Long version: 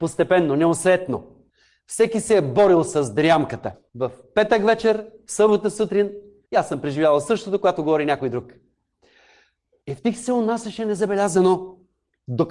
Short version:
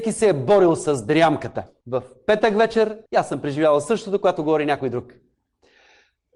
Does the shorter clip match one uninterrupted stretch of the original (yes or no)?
no